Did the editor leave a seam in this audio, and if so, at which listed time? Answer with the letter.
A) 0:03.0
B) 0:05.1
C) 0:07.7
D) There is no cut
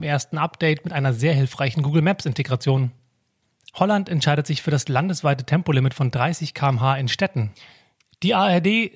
D